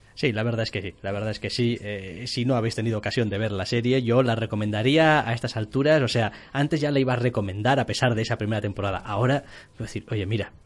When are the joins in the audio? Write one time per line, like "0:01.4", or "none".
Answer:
none